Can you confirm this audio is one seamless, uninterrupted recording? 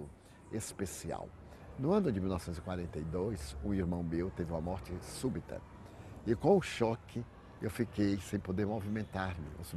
yes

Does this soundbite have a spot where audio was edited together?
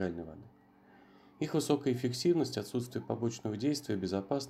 no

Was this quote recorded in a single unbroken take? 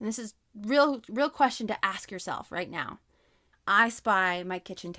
no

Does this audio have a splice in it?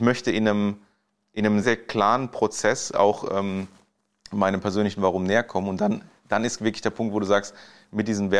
yes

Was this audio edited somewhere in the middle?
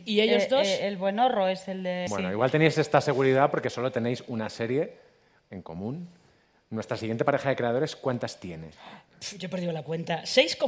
yes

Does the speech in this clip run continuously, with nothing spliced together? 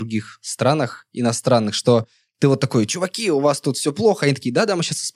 yes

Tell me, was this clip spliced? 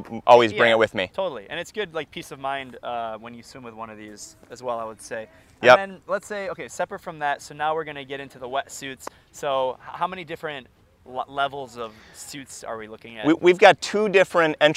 no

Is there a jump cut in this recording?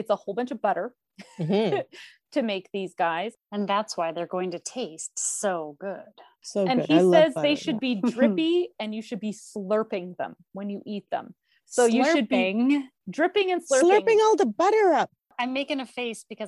no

